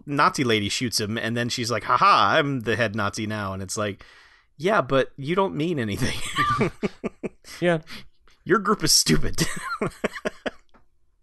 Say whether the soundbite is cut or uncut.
uncut